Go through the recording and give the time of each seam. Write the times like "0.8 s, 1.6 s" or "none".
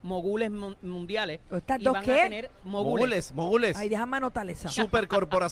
none